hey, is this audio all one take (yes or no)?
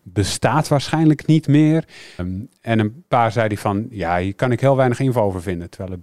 no